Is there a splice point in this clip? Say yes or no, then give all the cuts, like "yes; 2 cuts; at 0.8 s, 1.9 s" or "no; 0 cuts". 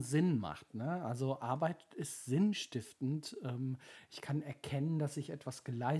no; 0 cuts